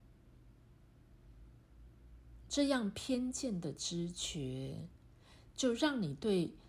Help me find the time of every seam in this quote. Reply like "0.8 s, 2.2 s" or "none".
2.5 s